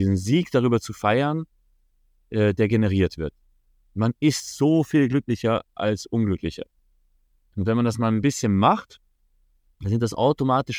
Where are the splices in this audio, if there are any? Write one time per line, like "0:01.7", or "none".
none